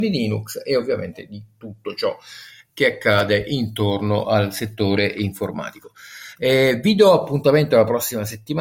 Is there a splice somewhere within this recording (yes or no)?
no